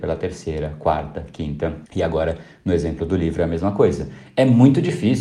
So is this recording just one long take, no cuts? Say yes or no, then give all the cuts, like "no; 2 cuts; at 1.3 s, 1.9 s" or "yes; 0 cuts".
no; 1 cut; at 1.9 s